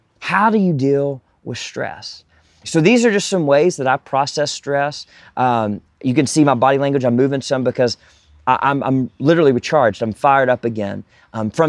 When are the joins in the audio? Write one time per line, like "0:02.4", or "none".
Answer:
0:02.6